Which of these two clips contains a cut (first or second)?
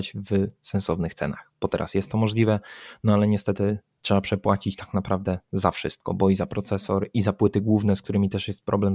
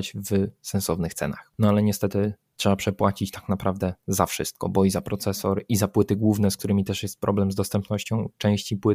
second